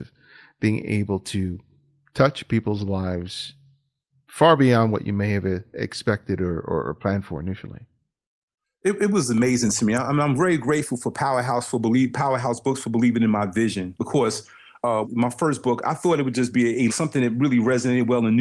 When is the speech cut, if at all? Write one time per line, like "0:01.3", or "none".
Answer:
0:15.0
0:16.9